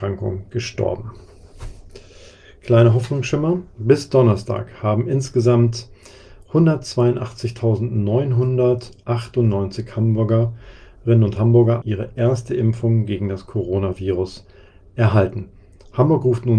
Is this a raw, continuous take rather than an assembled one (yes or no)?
no